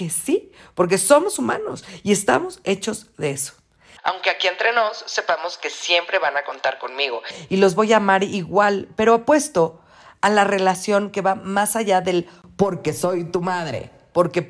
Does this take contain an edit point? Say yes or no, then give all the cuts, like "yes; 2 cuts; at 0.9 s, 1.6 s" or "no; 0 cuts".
yes; 1 cut; at 4.0 s